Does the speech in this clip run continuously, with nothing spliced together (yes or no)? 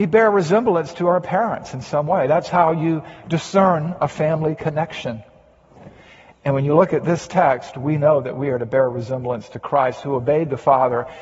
yes